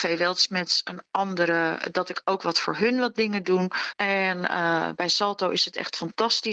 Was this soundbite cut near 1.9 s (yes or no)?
no